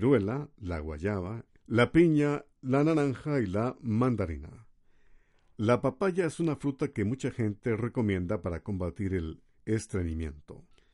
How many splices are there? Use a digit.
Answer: 1